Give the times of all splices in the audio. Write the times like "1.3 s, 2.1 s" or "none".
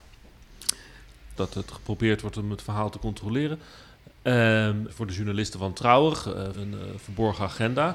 1.4 s, 4.9 s, 6.5 s